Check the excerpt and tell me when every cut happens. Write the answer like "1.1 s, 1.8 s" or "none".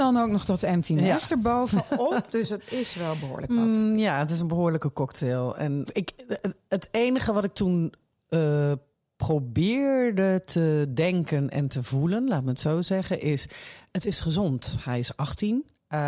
5.9 s